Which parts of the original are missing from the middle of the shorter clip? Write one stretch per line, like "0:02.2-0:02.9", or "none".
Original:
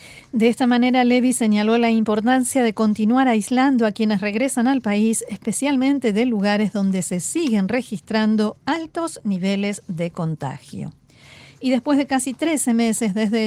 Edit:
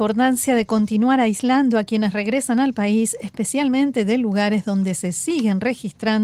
none